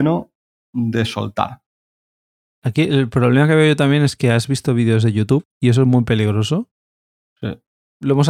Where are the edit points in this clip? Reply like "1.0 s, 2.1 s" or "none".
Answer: 5.5 s